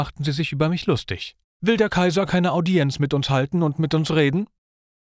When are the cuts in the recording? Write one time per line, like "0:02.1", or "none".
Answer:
0:01.4

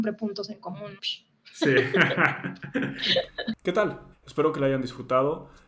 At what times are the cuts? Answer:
0:01.0
0:04.1

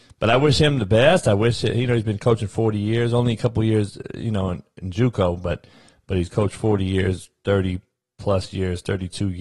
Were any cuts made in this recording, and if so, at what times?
none

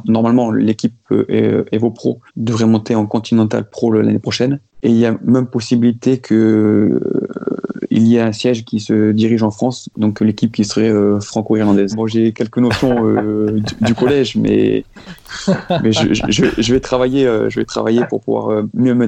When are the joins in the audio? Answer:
0:02.3
0:11.9

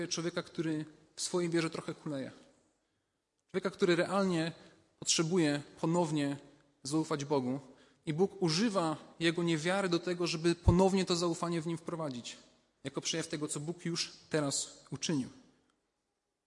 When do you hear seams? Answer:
0:12.8

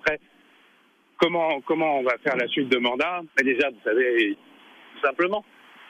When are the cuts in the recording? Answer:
0:03.3
0:04.3

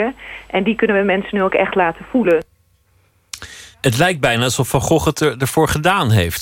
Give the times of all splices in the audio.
0:03.7

